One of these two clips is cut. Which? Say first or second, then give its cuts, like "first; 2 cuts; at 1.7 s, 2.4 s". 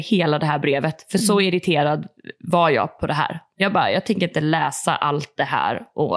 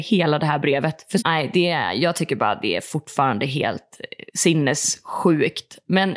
second; 2 cuts; at 1.2 s, 4.3 s